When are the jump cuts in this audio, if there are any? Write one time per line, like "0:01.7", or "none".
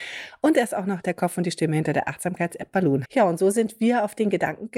0:03.0